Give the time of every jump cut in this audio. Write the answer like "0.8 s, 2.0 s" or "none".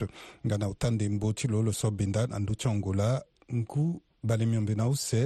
none